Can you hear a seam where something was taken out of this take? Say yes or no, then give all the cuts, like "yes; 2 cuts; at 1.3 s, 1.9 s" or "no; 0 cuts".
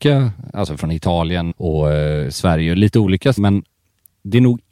yes; 2 cuts; at 1.5 s, 3.4 s